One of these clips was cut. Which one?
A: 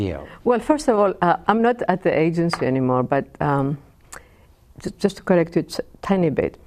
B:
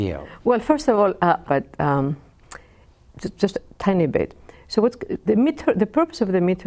B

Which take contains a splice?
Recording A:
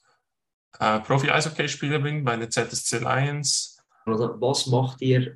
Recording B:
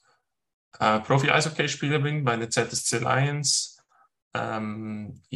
A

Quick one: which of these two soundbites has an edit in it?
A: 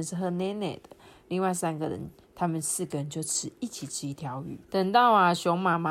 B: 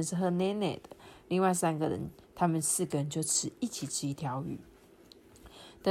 A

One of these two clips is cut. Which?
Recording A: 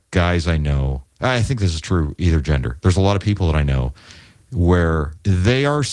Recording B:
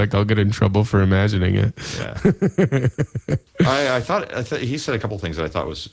A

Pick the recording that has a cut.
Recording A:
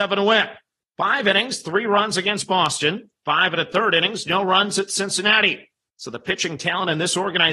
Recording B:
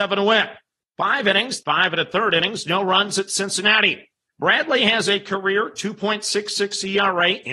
B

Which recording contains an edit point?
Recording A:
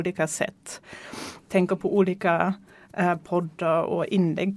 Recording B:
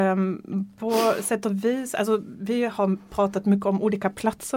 A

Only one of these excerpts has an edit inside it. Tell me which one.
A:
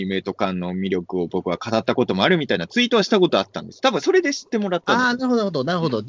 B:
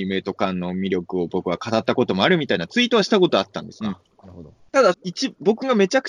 B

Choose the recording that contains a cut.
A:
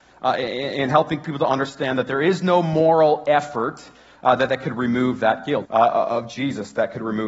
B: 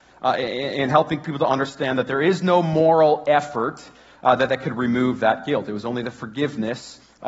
A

